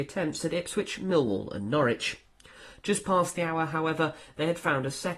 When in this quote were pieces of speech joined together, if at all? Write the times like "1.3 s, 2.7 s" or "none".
none